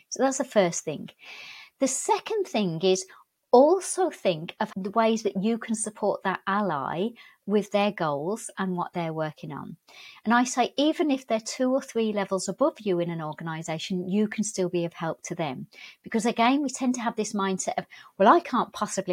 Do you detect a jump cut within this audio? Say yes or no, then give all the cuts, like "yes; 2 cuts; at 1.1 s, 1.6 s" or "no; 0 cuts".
no; 0 cuts